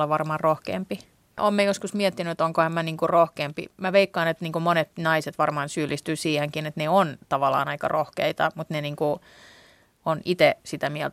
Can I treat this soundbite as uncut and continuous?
yes; 0 cuts

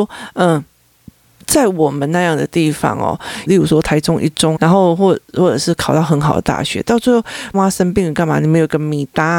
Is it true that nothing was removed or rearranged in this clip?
no; 3 cuts; at 3.5 s, 4.6 s, 7.5 s

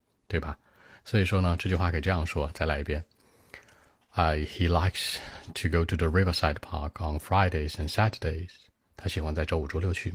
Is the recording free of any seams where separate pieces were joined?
yes; 0 cuts

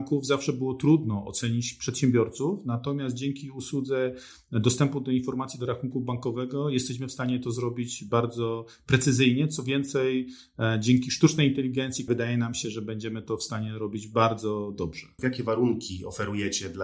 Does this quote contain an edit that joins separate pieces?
yes; 2 cuts; at 12.1 s, 15.2 s

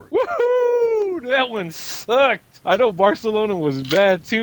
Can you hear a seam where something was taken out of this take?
yes; 1 cut; at 2.6 s

